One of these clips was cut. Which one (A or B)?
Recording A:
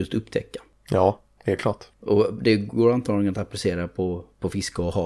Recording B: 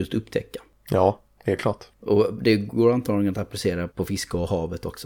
B